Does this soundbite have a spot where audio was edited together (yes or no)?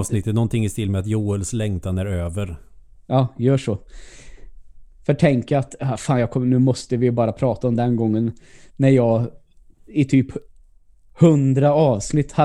no